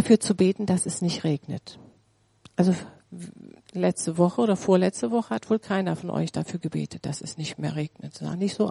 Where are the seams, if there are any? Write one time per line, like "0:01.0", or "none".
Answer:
none